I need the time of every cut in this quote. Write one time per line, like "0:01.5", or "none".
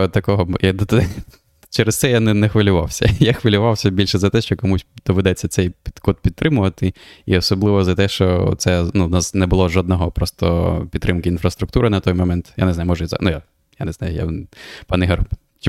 none